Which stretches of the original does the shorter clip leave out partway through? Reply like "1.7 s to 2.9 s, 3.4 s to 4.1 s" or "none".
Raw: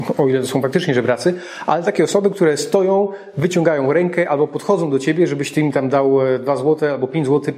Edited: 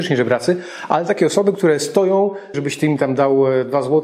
3.3 s to 5.3 s